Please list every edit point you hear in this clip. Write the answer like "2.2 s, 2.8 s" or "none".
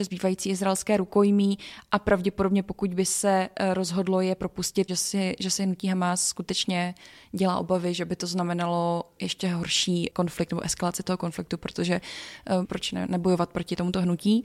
4.9 s, 12.6 s